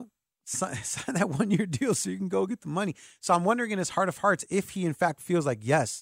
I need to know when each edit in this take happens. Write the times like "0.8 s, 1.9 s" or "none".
none